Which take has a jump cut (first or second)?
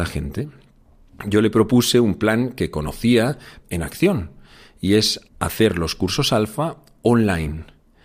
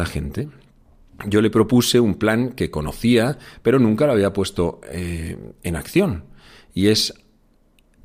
first